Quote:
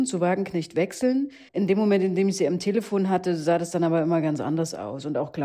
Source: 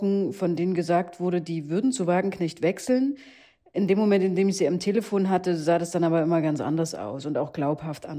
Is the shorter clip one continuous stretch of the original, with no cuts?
no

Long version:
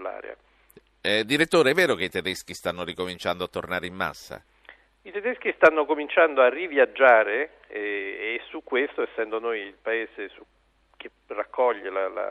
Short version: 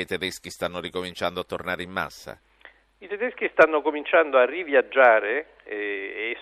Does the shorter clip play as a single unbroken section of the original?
yes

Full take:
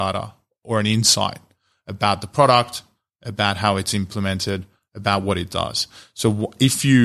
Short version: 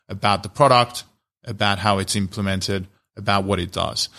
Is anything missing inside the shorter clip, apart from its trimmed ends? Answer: no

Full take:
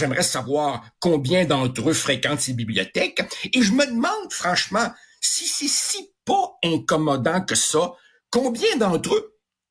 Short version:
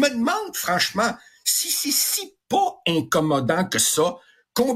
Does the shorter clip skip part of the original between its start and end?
no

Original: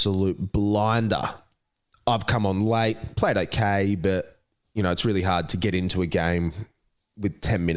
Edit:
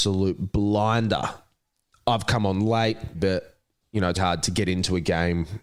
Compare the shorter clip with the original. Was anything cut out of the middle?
yes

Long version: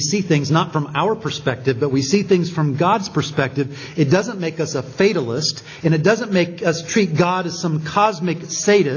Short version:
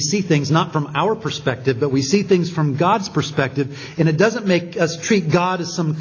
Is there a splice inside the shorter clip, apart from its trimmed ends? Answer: yes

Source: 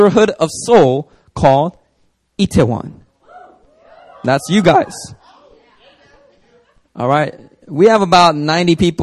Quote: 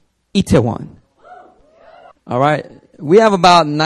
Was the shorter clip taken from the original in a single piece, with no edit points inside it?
no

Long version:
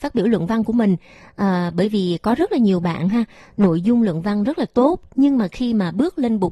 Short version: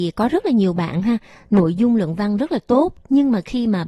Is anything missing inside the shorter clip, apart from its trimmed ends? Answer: no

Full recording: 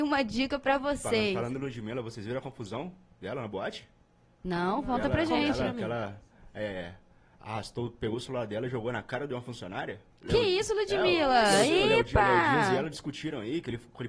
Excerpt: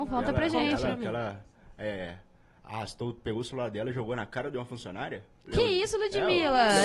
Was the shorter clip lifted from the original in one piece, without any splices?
yes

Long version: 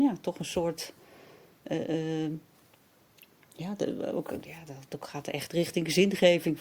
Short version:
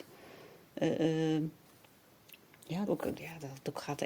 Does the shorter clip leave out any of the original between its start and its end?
yes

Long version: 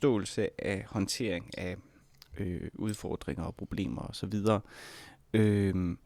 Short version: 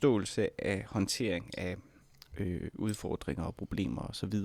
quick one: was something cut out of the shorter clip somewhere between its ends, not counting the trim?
no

